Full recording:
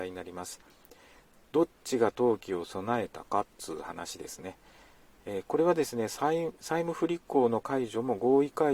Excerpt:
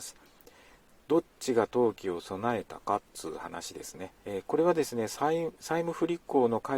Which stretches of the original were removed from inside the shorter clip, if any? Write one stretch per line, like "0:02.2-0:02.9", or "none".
0:04.6-0:05.2